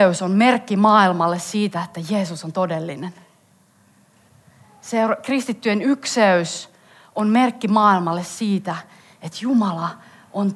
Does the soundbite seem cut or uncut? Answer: uncut